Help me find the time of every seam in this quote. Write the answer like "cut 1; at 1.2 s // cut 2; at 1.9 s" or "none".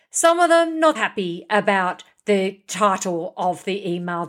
cut 1; at 0.9 s